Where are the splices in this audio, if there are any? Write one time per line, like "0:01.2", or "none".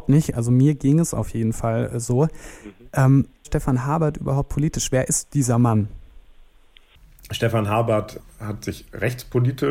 0:03.4